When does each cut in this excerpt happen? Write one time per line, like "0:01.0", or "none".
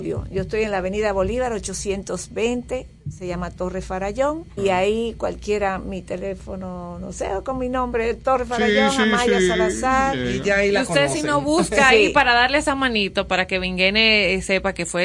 0:04.6